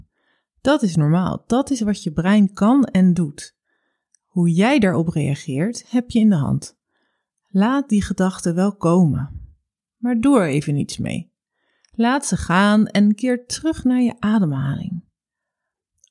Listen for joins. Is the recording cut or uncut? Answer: uncut